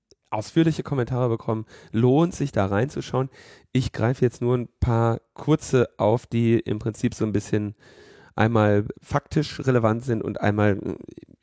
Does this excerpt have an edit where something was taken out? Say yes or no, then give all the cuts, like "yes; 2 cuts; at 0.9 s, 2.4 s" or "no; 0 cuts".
yes; 1 cut; at 8.9 s